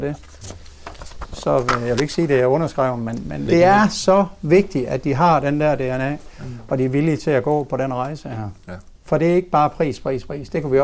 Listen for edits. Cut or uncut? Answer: cut